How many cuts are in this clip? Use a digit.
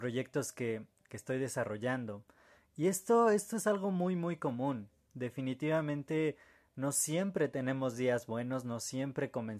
0